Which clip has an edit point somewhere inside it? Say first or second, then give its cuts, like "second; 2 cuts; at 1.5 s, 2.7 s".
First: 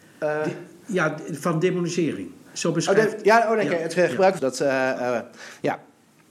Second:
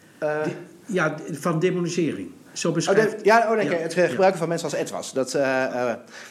first; 1 cut; at 4.4 s